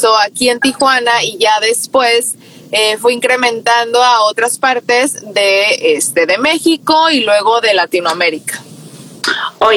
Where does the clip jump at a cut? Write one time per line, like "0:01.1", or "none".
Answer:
none